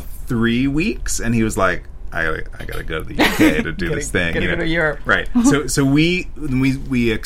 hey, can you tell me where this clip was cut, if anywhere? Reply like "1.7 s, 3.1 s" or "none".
none